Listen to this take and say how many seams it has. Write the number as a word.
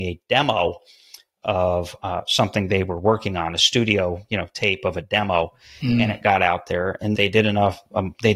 one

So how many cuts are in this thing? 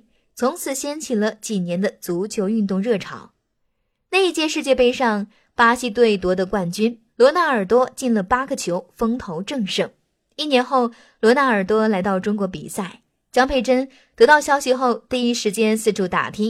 zero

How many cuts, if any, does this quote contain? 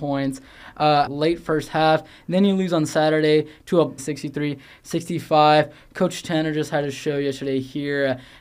two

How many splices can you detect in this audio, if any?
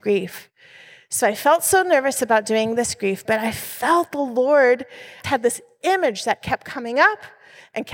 two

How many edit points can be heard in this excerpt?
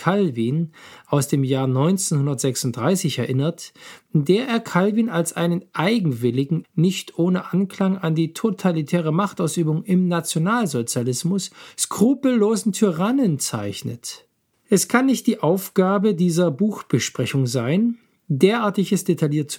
two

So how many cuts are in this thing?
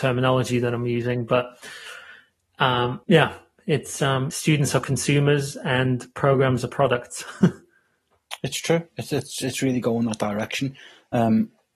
two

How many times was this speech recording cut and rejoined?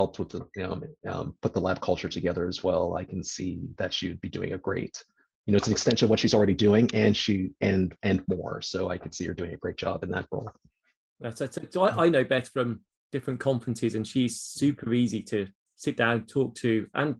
zero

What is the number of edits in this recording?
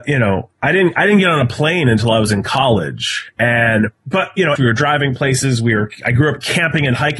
one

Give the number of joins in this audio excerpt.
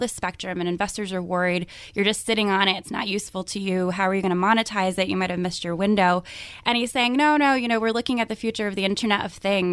zero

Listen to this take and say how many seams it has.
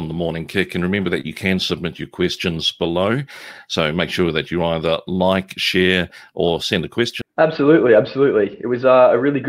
one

